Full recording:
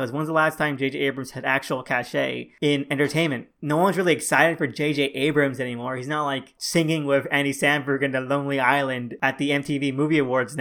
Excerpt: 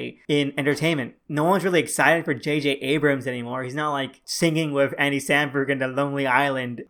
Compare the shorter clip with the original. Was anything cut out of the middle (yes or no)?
no